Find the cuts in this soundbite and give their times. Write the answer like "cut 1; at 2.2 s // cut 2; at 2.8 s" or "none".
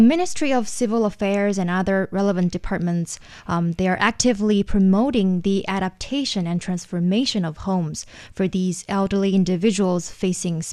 none